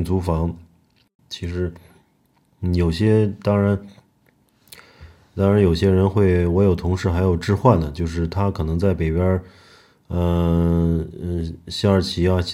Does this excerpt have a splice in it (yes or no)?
yes